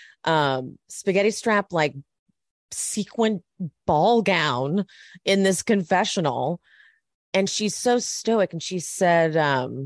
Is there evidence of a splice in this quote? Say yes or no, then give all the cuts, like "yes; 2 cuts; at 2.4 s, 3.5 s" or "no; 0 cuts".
no; 0 cuts